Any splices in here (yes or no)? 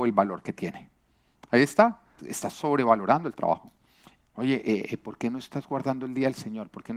yes